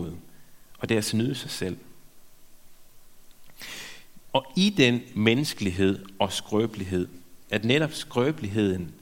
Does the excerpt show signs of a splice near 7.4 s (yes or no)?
yes